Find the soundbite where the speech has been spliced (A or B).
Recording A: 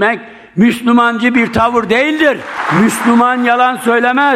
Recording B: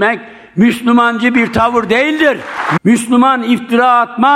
B